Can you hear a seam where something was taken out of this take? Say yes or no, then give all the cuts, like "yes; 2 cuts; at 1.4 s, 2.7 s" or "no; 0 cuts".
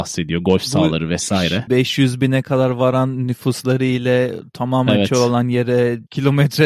yes; 1 cut; at 1.7 s